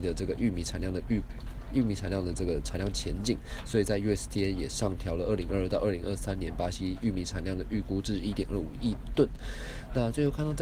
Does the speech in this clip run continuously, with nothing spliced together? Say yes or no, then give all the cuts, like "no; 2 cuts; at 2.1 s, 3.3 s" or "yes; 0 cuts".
yes; 0 cuts